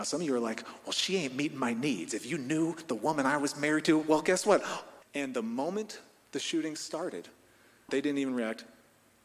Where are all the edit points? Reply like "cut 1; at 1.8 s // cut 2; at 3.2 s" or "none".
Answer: cut 1; at 5.0 s // cut 2; at 7.9 s